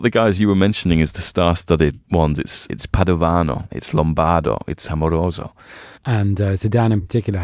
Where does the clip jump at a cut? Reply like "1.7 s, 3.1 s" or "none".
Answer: 2.7 s, 3.7 s, 5.9 s